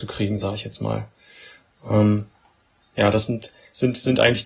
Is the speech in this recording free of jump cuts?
yes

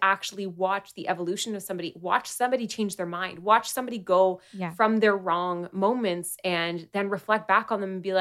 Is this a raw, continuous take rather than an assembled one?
yes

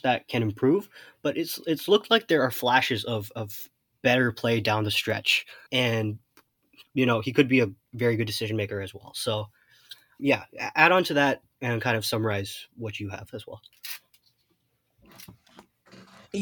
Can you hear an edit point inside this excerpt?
yes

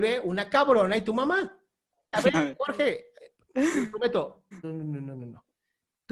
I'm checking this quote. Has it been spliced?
yes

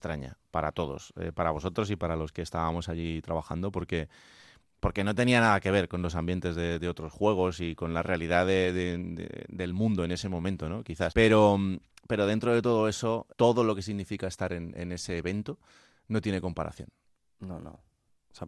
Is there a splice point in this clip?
yes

